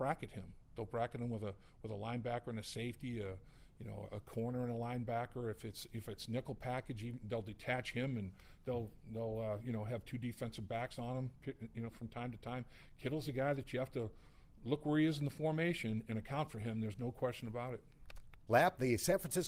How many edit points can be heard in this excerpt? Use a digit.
0